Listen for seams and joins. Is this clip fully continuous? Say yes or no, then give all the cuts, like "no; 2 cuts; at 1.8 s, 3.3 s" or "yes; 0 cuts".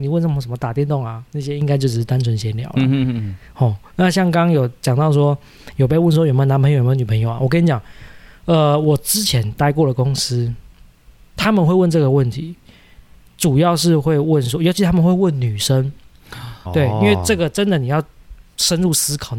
no; 1 cut; at 16.7 s